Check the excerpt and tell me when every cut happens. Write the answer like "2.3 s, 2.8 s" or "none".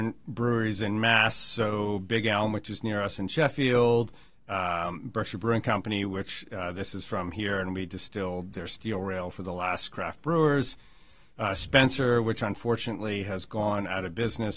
none